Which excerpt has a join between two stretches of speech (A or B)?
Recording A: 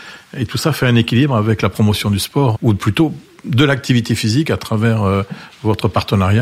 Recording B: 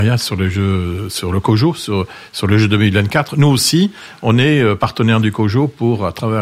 A